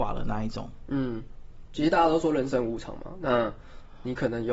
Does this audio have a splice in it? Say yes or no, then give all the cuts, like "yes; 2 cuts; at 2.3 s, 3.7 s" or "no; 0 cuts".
yes; 1 cut; at 1.7 s